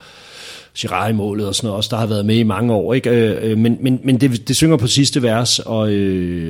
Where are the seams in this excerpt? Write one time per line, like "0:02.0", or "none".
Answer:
none